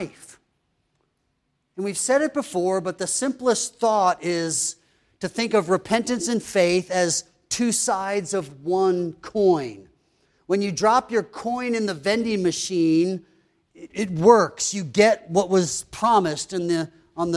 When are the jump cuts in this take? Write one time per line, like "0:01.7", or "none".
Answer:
0:13.9

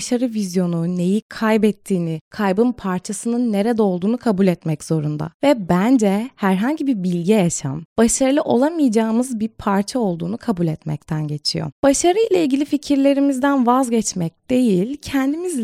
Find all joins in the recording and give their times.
none

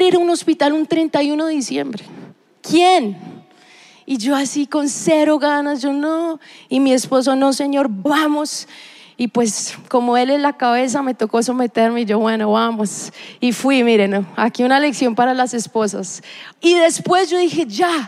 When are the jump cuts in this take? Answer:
0:08.1
0:16.6

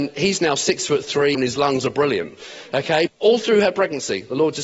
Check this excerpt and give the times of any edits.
0:01.3
0:03.1

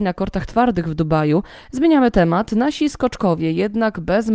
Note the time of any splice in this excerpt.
0:01.6

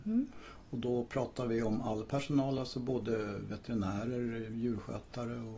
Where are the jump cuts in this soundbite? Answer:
none

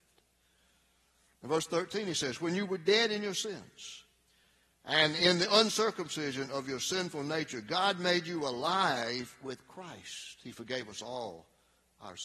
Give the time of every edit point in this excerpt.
none

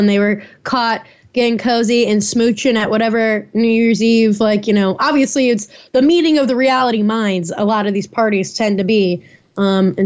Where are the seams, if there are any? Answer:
none

